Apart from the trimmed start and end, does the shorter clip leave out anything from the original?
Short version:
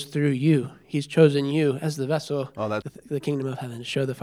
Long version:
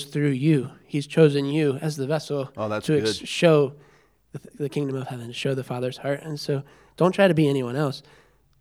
yes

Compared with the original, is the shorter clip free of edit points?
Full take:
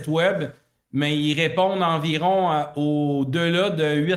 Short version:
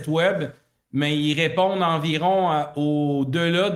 yes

